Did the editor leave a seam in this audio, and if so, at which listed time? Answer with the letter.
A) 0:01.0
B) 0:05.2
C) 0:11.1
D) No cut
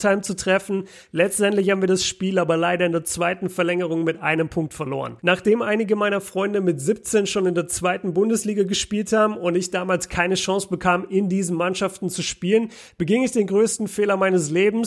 B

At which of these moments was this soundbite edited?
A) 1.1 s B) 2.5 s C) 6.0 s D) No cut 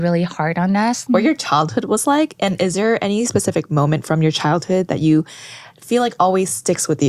A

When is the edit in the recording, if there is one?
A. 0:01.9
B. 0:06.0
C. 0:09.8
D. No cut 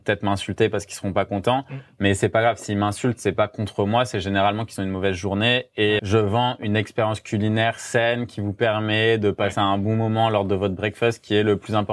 B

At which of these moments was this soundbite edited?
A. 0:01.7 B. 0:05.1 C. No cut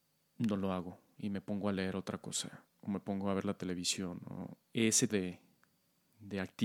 B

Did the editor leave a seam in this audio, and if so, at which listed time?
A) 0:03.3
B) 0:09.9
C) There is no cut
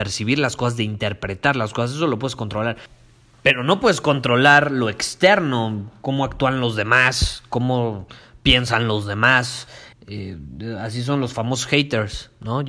B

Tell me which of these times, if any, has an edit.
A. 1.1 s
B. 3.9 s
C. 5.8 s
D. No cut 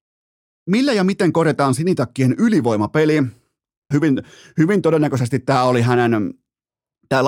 B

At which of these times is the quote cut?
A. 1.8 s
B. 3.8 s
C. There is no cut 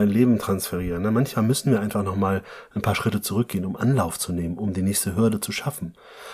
B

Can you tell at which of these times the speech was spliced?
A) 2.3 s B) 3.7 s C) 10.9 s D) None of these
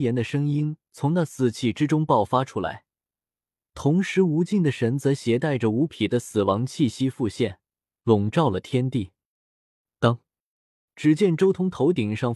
C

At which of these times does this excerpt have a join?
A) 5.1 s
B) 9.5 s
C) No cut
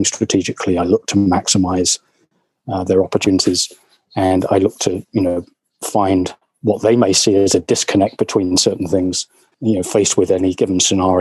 B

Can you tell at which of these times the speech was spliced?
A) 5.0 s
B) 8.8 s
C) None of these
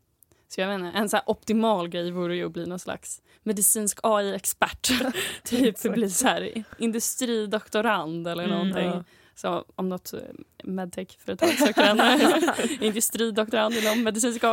A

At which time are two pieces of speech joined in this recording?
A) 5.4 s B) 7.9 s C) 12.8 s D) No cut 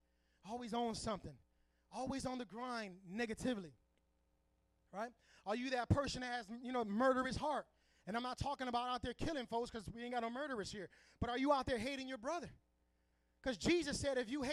D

